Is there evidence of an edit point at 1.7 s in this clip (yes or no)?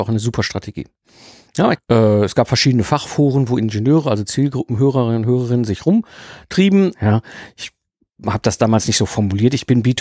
yes